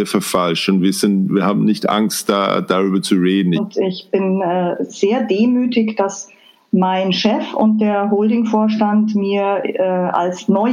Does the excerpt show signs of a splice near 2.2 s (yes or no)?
no